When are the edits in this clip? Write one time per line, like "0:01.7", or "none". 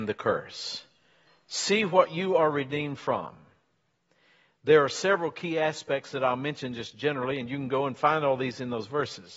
none

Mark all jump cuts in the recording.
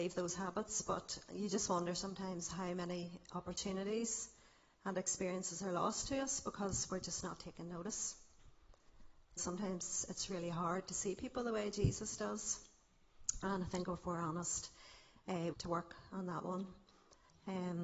0:09.4
0:15.5

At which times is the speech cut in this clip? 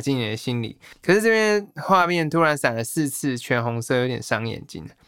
0:00.9

